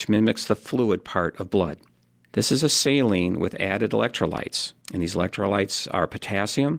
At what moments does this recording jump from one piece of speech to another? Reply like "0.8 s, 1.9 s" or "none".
2.2 s, 4.8 s